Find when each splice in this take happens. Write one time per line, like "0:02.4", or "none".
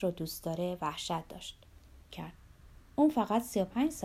0:02.1